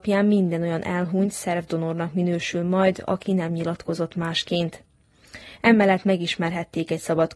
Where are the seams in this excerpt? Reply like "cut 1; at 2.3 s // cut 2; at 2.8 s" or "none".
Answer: none